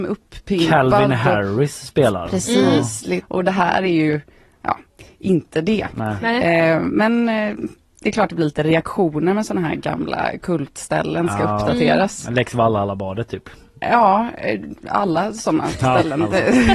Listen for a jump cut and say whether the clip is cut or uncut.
cut